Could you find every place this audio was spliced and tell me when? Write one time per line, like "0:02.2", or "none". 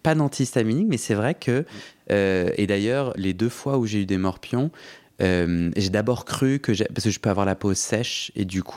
0:03.2